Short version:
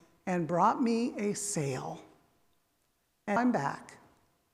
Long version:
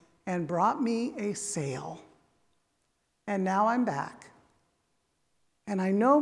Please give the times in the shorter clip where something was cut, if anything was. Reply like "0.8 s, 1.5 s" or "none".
3.4 s